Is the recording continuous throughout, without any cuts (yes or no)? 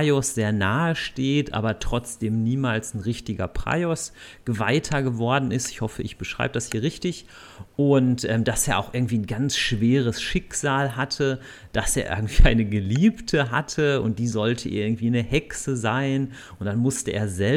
yes